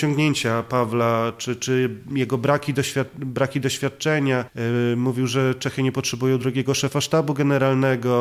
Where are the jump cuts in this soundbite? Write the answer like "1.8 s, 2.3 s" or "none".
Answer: none